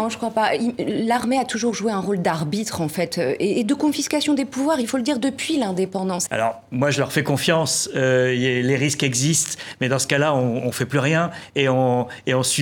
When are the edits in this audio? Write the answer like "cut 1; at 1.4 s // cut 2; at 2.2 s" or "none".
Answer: cut 1; at 6.3 s